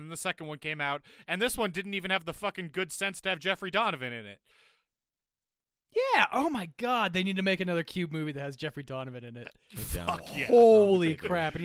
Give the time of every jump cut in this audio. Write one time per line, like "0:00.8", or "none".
none